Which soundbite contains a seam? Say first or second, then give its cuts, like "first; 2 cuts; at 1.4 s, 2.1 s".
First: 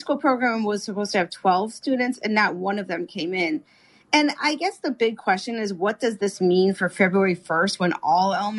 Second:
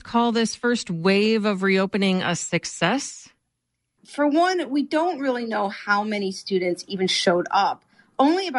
second; 1 cut; at 4.0 s